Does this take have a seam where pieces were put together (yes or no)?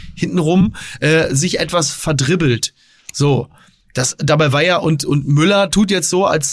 no